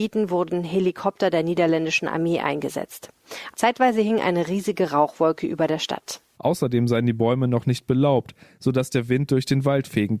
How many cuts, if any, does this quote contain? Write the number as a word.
two